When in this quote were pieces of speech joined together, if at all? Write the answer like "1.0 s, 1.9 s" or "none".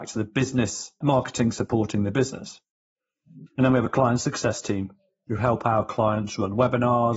1.0 s, 3.5 s

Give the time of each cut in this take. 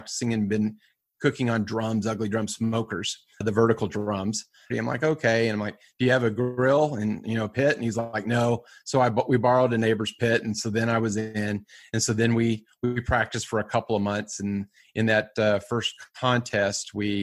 4.7 s

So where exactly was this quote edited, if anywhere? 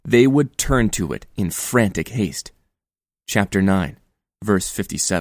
none

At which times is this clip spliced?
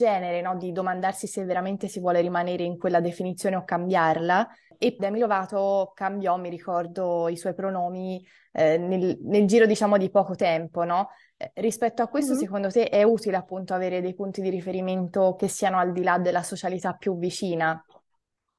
5.0 s

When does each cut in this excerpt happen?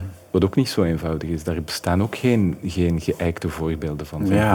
none

